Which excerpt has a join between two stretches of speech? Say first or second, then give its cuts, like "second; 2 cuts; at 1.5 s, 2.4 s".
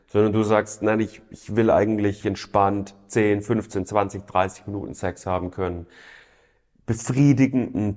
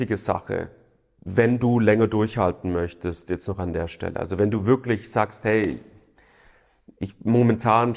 first; 1 cut; at 2.2 s